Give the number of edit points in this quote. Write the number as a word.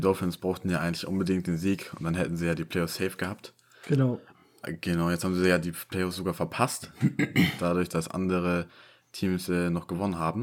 zero